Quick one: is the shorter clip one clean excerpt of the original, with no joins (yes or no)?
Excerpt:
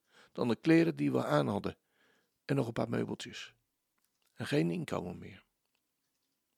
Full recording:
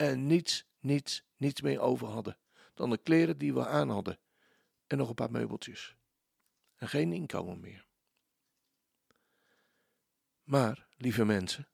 yes